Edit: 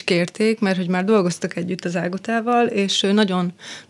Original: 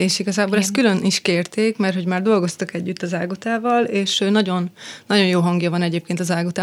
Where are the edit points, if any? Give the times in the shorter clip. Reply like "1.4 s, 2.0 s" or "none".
none